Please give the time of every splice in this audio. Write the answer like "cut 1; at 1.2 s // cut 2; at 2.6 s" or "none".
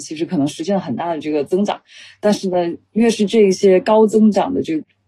none